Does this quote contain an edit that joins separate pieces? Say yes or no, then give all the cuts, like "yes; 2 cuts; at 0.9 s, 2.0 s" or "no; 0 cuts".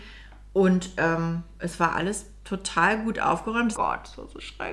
yes; 1 cut; at 3.7 s